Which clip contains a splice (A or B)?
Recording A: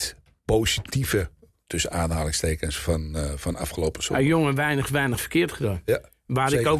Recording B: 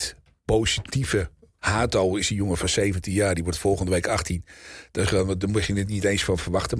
B